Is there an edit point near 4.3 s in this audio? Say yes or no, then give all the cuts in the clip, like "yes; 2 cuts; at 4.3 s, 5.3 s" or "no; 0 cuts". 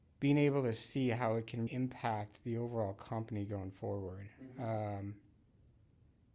no; 1 cut; at 1.7 s